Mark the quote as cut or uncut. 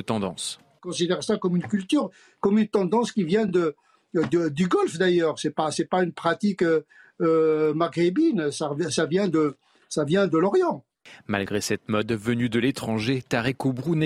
uncut